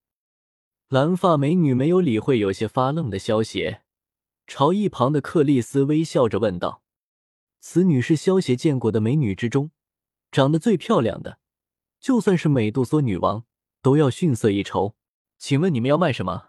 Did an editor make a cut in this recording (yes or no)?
yes